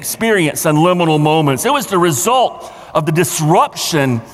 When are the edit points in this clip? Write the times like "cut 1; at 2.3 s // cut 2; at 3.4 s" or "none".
none